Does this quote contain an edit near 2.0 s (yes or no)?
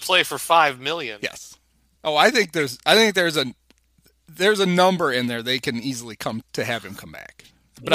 yes